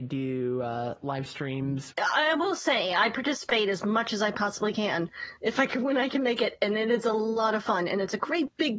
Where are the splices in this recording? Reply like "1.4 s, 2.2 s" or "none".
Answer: 1.9 s